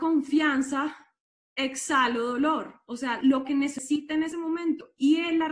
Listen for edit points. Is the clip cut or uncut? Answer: uncut